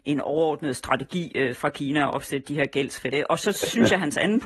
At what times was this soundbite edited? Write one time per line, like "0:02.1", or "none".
0:03.1